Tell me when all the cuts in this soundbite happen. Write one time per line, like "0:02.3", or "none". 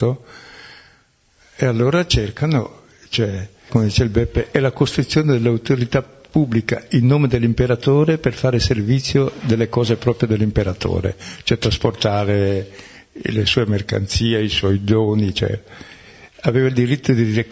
0:03.7